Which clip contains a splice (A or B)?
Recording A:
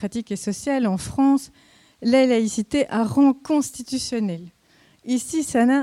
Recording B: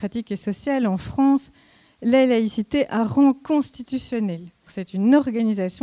B